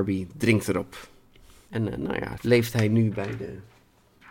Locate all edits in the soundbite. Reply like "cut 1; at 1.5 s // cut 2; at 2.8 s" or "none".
cut 1; at 2.4 s